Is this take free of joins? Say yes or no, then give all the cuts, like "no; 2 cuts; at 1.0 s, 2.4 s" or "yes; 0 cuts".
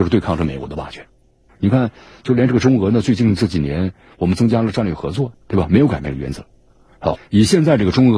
no; 3 cuts; at 1.5 s, 5.3 s, 7.1 s